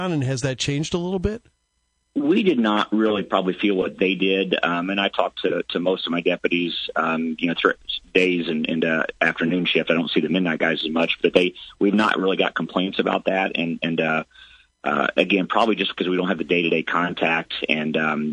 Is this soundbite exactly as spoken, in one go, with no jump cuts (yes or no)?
yes